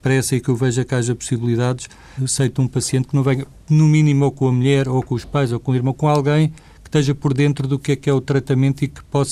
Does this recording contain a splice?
yes; 1 cut; at 2.2 s

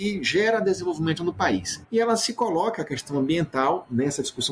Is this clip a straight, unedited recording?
no; 1 cut; at 1.8 s

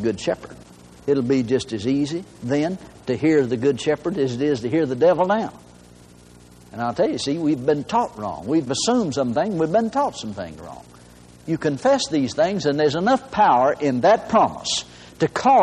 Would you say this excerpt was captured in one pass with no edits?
yes; 0 cuts

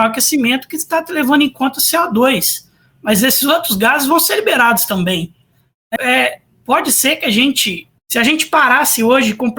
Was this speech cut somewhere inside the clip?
yes; 2 cuts; at 6.0 s, 8.0 s

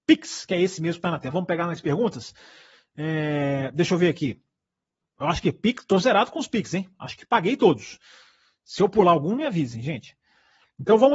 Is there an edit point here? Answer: yes; 1 cut; at 1.3 s

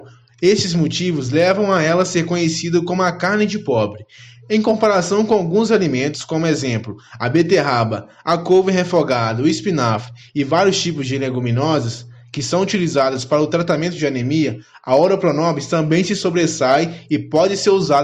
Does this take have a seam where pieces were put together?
no; 0 cuts

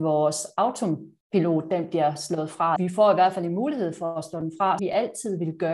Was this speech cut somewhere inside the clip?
yes; 2 cuts; at 2.8 s, 4.8 s

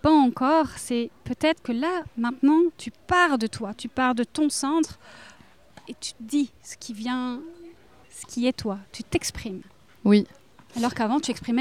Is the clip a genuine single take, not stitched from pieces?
no; 1 cut; at 8.0 s

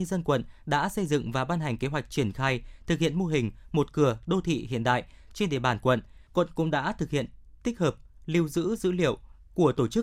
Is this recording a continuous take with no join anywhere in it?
no; 1 cut; at 6.3 s

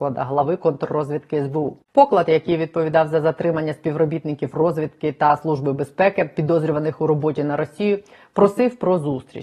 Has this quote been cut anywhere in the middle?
no; 0 cuts

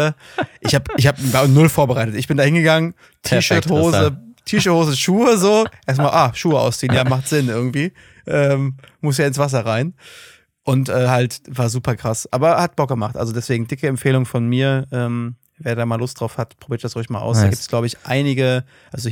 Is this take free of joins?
yes; 0 cuts

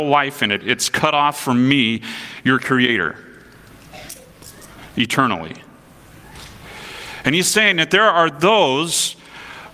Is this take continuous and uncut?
yes; 0 cuts

